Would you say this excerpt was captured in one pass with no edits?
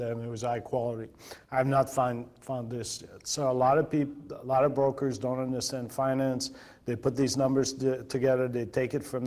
yes; 0 cuts

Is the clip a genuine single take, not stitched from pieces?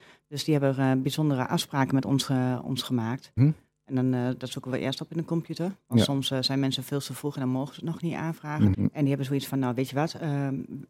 no; 2 cuts; at 3.4 s, 8.7 s

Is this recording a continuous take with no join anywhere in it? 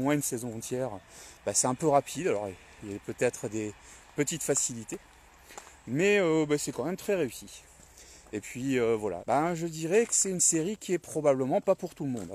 no; 1 cut; at 9.2 s

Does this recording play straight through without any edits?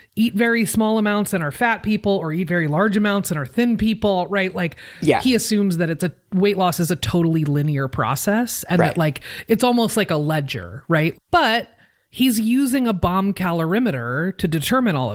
no; 1 cut; at 11.1 s

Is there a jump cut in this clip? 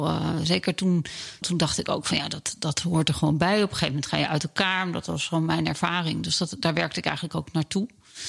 yes; 1 cut; at 1.4 s

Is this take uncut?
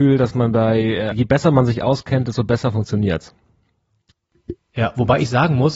no; 1 cut; at 1.1 s

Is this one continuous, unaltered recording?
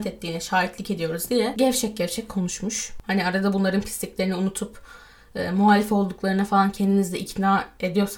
yes; 0 cuts

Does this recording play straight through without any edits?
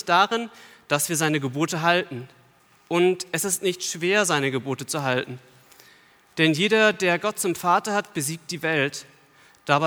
yes; 0 cuts

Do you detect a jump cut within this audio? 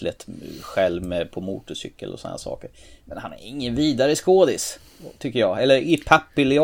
no; 0 cuts

